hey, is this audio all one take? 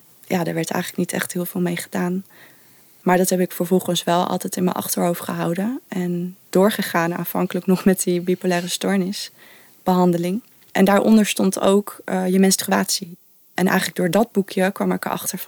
no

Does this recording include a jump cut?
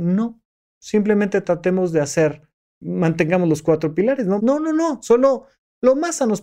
yes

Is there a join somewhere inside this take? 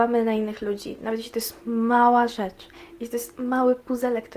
no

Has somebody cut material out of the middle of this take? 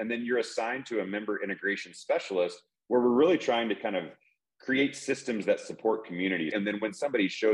yes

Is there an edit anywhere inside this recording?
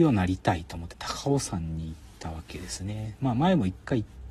yes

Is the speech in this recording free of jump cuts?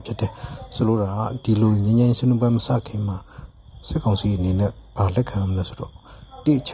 yes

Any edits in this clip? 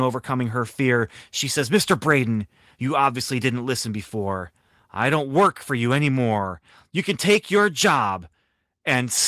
no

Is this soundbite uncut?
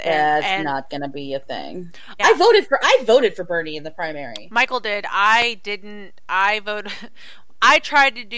no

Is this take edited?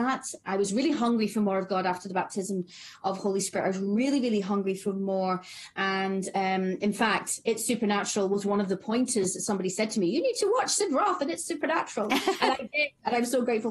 no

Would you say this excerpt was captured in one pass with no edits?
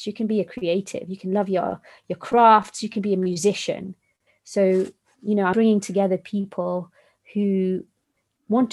no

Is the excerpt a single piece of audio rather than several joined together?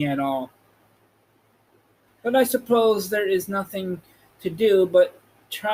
no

